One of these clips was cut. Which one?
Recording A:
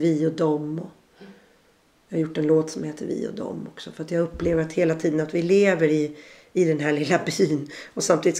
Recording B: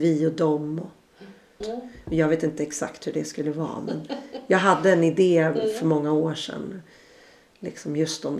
B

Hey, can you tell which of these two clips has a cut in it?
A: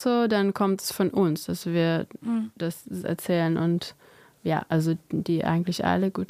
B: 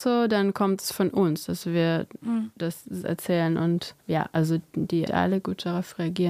B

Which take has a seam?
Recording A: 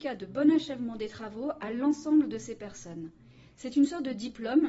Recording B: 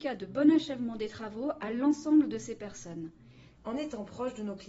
B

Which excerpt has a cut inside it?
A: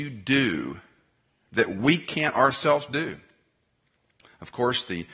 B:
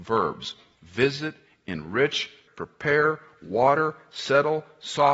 B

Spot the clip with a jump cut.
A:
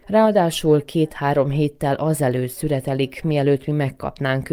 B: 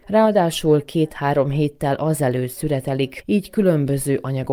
B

